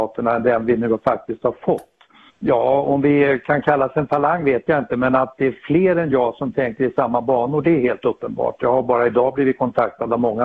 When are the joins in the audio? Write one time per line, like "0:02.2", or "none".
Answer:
0:02.3